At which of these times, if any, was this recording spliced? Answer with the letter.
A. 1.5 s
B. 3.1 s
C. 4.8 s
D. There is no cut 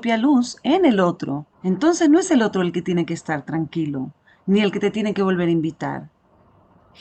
A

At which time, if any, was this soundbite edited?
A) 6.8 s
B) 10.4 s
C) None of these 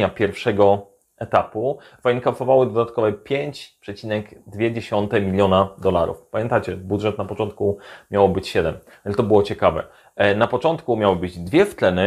C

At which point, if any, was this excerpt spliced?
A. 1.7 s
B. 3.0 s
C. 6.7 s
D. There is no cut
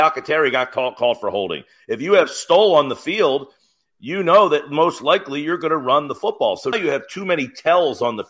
C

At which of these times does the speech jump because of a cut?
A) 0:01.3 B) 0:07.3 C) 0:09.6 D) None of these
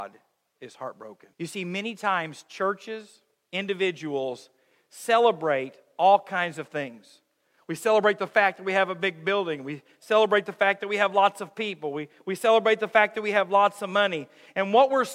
A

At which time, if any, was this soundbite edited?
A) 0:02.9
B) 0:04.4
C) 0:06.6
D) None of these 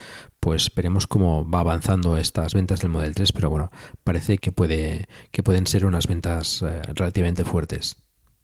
B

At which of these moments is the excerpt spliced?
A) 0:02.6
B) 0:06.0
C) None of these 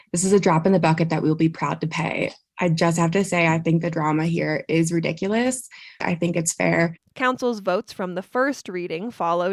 B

